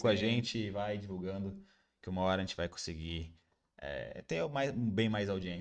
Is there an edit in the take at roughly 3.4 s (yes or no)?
no